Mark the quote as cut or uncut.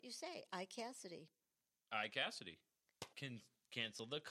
cut